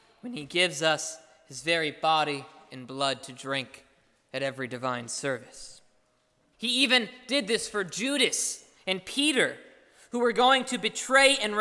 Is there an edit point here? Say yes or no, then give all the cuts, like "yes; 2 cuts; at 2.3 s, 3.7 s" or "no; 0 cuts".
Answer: yes; 1 cut; at 6.5 s